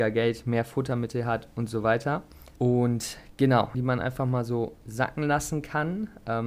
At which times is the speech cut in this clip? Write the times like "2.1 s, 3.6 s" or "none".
2.6 s, 3.7 s